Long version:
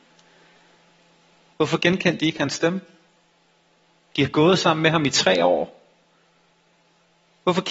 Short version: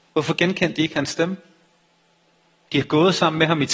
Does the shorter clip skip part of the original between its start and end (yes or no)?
no